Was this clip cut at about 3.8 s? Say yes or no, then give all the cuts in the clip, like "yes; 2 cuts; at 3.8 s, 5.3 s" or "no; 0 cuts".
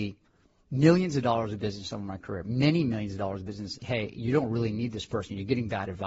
yes; 1 cut; at 3.8 s